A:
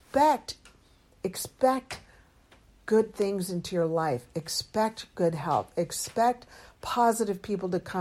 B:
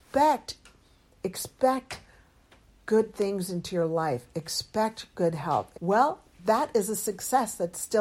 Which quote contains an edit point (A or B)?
B